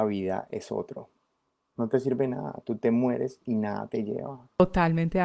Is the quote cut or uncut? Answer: uncut